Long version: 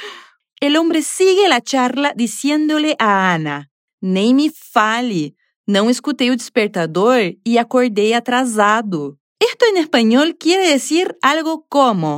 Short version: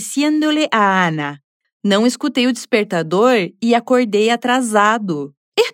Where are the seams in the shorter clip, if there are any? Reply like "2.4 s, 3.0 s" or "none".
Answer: 1.6 s